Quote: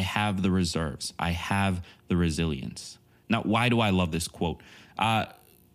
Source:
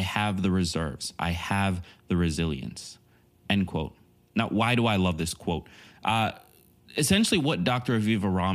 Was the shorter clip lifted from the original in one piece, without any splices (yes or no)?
no